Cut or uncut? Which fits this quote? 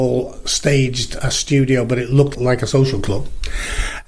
cut